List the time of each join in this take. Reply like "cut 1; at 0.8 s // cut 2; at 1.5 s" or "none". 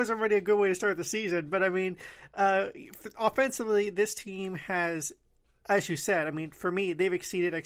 none